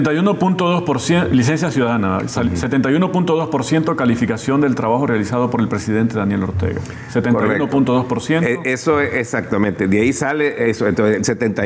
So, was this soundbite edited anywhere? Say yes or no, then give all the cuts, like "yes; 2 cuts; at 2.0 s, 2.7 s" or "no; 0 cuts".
no; 0 cuts